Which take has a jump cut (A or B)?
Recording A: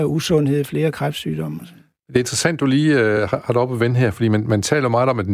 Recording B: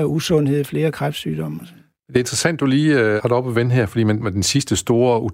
B